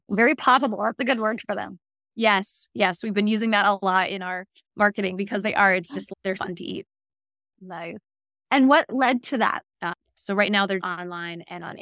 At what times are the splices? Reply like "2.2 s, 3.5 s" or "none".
6.4 s, 9.6 s, 10.8 s